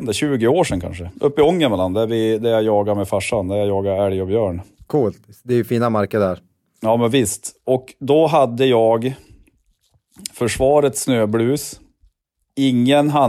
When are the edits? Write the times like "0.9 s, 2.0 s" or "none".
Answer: none